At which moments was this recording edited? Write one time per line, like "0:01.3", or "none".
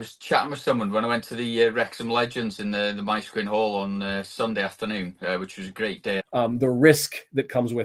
0:06.2